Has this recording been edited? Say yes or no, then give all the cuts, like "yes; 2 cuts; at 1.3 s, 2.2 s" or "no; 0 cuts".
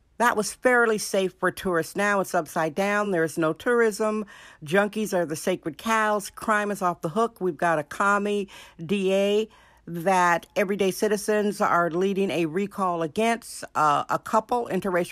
no; 0 cuts